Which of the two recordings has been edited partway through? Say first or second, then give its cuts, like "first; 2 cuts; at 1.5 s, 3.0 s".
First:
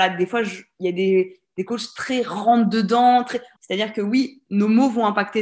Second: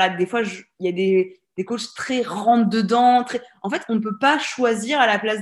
first; 1 cut; at 3.6 s